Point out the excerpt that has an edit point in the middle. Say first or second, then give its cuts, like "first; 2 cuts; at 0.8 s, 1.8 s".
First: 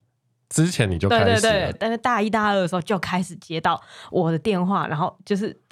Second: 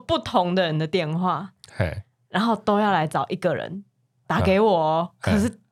first; 1 cut; at 1.7 s